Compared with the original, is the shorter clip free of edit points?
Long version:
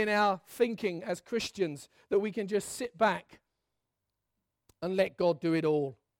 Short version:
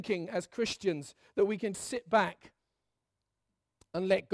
no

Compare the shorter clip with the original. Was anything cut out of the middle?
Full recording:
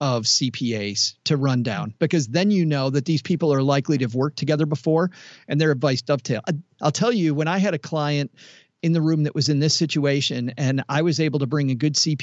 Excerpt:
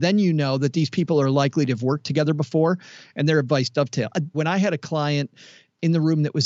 yes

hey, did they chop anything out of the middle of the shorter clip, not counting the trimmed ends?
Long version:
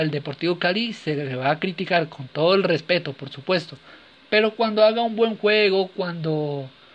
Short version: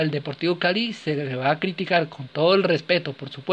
no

